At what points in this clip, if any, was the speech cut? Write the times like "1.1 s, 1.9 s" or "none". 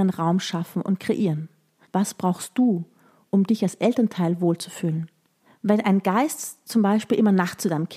1.8 s, 5.5 s